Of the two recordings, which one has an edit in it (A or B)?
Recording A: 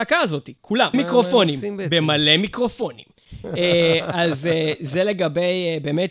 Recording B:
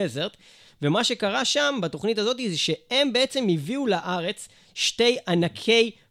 A